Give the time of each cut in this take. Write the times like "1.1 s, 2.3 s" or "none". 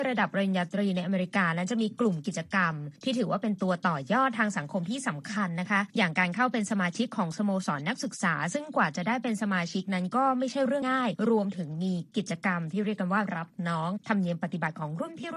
10.8 s